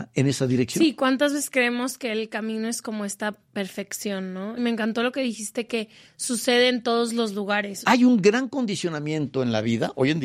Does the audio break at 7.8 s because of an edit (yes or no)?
yes